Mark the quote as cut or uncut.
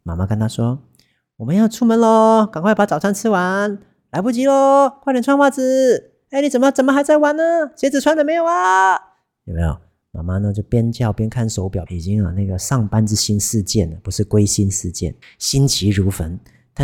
cut